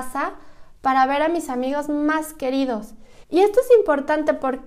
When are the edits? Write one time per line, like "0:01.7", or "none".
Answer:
0:03.2